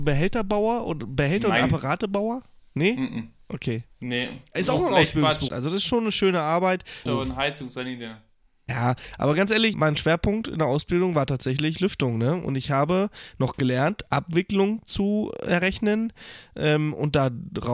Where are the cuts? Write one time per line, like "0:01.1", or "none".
0:05.5
0:07.1
0:09.7